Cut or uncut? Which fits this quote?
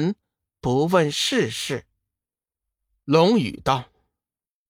uncut